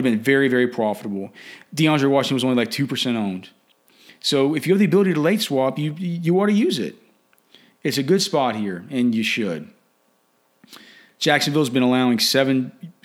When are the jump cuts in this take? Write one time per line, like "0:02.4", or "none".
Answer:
none